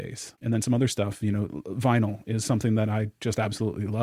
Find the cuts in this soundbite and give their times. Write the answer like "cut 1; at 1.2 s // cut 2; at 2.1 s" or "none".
none